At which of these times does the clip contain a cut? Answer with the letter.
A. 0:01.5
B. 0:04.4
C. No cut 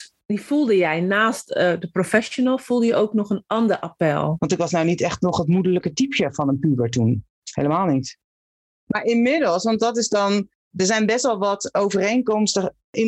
B